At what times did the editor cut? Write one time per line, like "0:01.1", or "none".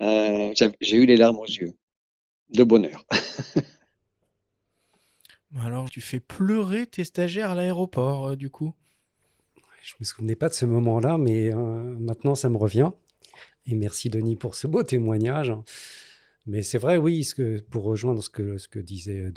0:05.9

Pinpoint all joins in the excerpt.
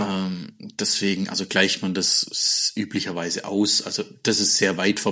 none

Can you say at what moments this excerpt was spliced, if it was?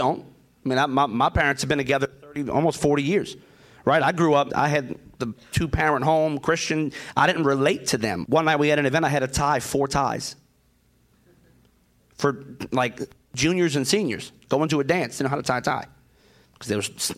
0:04.5
0:08.2

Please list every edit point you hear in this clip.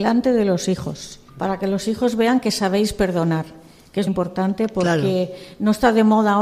0:01.3
0:04.1

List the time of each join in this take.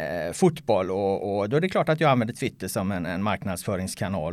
none

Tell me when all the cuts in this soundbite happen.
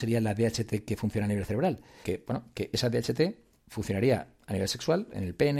0:02.0

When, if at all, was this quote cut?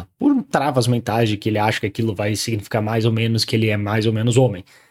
none

